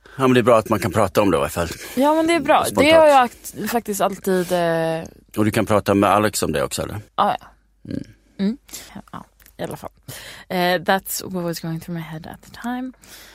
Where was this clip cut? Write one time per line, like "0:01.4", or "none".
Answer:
0:07.1
0:08.9

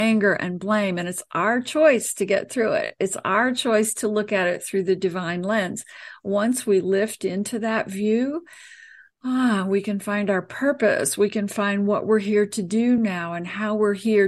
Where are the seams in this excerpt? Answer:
none

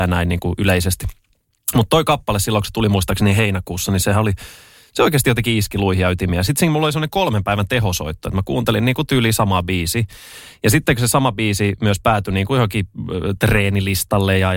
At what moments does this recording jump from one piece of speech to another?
none

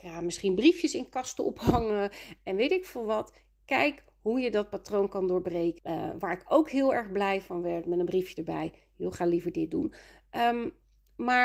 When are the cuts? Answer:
0:05.8

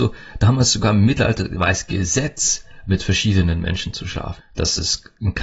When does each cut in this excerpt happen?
0:04.4

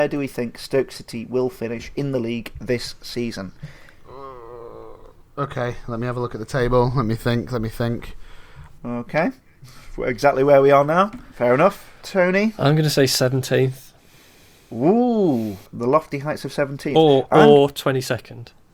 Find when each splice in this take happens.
0:08.8
0:11.3
0:15.7

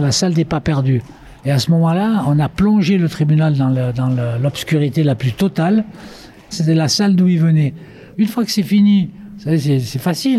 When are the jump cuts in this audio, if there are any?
0:01.4
0:06.5
0:08.1

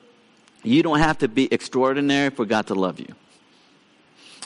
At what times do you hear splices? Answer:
none

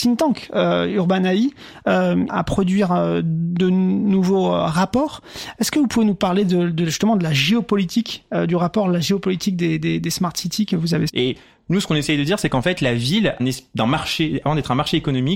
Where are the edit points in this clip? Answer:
0:02.3
0:11.1
0:13.4

